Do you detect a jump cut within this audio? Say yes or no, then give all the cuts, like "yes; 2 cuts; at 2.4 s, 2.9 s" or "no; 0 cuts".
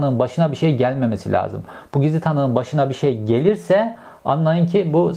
no; 0 cuts